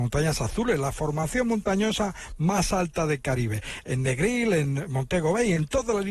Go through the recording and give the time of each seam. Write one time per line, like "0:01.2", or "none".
0:03.8